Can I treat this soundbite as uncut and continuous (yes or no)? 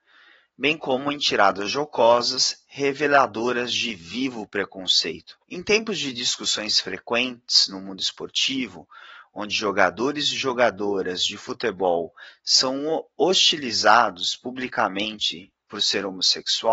no